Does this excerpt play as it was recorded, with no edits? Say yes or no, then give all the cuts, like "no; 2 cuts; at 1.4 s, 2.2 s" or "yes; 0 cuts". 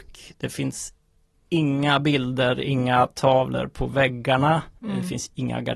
no; 1 cut; at 4.8 s